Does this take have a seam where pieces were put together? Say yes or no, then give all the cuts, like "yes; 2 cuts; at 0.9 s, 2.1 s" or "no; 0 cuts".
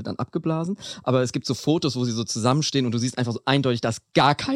no; 0 cuts